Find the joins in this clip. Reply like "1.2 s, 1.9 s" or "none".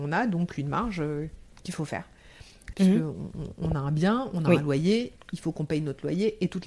2.7 s